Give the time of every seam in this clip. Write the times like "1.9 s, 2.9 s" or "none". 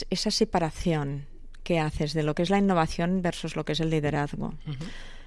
none

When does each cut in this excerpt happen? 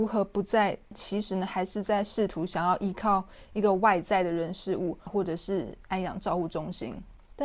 0.9 s, 5.1 s

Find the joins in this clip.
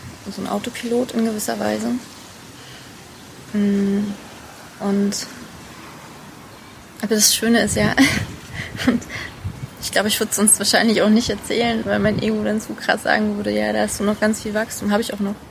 none

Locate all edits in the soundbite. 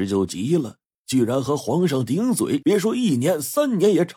2.6 s

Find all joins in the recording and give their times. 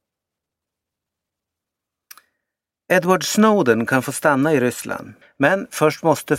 5.2 s

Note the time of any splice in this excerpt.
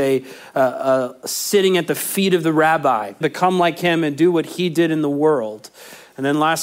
3.2 s

